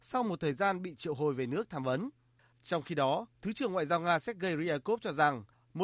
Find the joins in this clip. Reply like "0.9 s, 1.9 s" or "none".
2.5 s